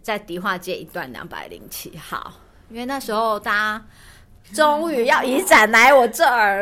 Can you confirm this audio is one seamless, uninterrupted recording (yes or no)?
no